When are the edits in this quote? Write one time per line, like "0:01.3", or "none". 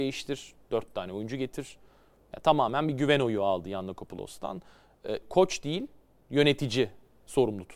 0:05.2